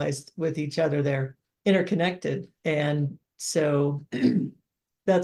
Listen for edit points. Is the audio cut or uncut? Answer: cut